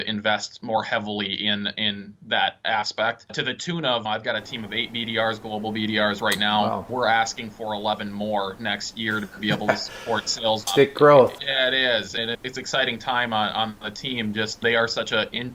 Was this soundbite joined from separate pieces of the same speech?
yes; 1 cut; at 11.4 s

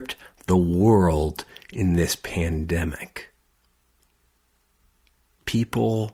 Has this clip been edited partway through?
no; 0 cuts

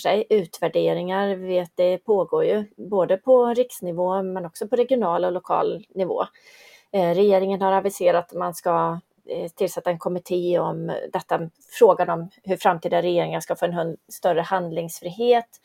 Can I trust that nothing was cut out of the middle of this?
yes; 0 cuts

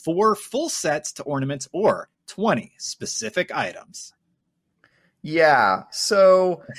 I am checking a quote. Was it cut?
no; 0 cuts

